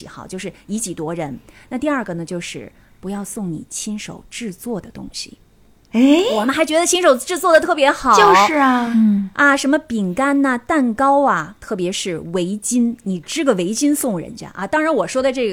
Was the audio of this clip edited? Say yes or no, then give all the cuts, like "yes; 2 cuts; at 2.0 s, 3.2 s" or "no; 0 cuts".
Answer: no; 0 cuts